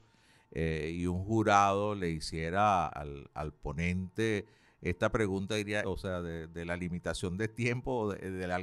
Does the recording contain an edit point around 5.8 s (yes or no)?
yes